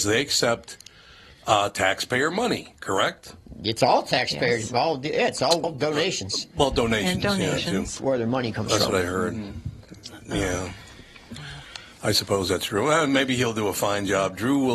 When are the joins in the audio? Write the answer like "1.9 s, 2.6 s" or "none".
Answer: 5.6 s, 8.0 s